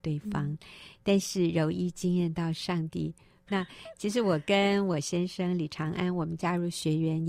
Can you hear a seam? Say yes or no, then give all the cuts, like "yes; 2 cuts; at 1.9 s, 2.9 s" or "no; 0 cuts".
yes; 1 cut; at 3.5 s